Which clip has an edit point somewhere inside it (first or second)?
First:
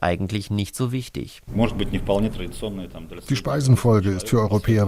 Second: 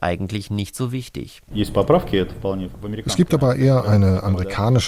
second